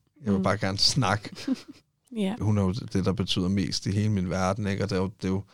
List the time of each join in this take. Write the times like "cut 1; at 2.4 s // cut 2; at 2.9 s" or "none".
cut 1; at 2.4 s